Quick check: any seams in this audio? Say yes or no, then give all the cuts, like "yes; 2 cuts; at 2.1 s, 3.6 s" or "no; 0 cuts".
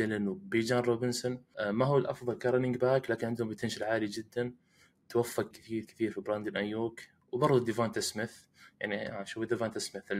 yes; 1 cut; at 5.5 s